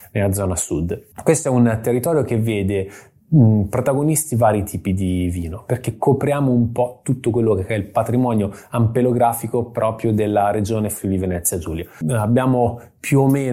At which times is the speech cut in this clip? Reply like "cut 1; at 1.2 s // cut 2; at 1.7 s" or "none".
cut 1; at 1.1 s // cut 2; at 12.0 s